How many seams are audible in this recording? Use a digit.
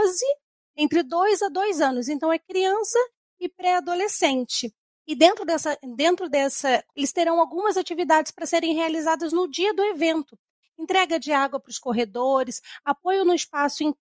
3